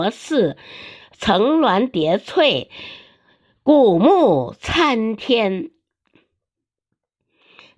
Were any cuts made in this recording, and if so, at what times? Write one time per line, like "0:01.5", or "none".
none